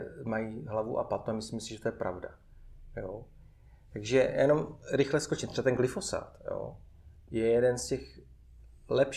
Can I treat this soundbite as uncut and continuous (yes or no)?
yes